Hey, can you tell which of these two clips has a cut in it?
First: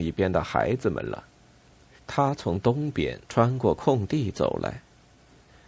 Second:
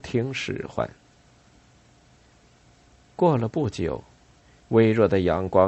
first; 2 cuts; at 2.0 s, 3.2 s

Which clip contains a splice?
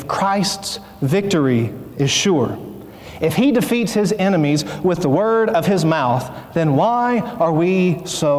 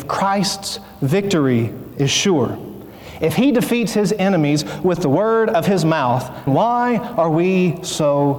second; 1 cut; at 6.5 s

